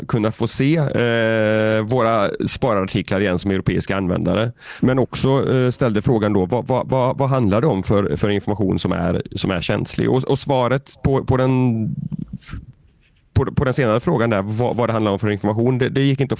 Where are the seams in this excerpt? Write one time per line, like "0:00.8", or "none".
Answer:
0:04.8

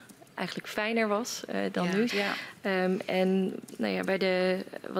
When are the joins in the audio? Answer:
0:02.1

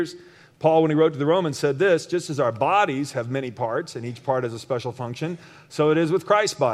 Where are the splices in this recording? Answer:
none

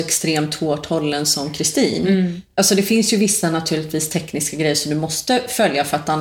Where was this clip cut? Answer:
none

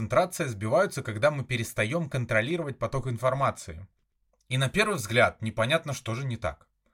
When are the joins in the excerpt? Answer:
0:04.3

